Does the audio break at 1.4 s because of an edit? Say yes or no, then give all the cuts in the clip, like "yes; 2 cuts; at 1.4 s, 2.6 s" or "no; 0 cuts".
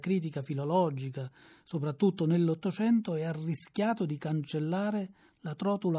no; 0 cuts